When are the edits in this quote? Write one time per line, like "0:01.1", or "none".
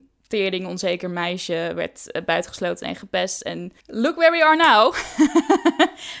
0:03.8